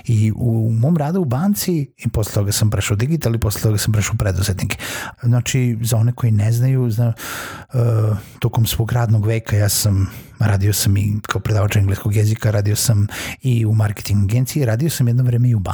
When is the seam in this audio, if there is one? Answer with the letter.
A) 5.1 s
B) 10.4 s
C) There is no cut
A